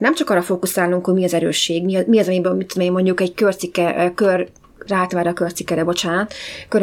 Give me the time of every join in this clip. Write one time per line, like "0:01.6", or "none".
0:04.9